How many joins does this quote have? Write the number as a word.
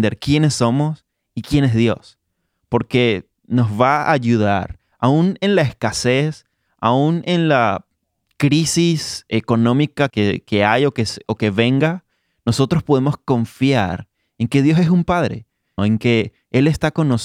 two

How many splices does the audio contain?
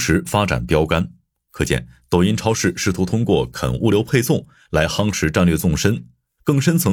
zero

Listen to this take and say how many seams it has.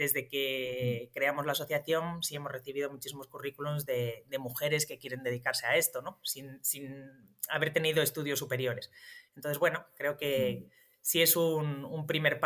zero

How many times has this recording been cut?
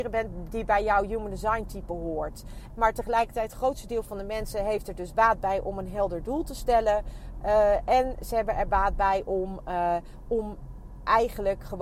one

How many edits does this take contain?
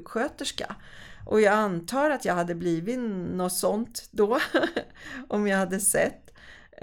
zero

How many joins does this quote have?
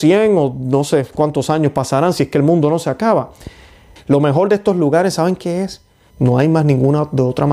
two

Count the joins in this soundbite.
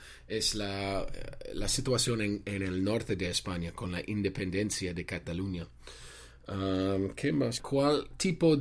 one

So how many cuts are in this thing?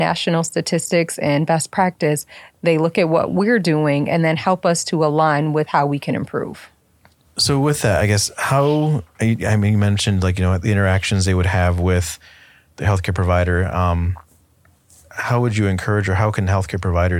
zero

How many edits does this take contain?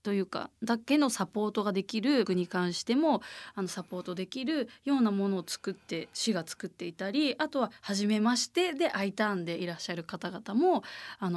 one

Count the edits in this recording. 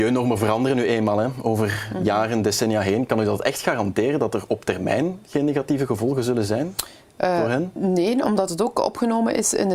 zero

